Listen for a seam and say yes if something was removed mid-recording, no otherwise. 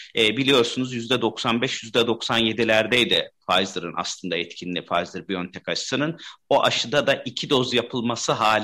no